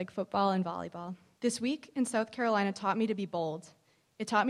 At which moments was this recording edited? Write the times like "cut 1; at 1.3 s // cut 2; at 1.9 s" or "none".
cut 1; at 1.4 s